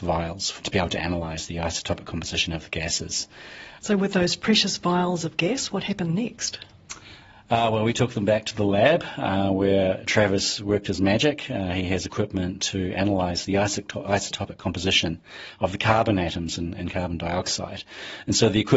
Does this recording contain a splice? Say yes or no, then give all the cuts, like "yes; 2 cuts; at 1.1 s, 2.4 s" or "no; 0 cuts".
no; 0 cuts